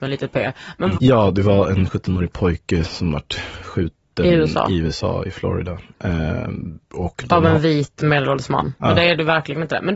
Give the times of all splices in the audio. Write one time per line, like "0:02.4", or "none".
0:01.0
0:06.8
0:08.8